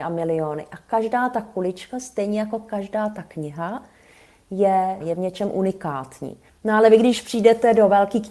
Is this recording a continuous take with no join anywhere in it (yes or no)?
no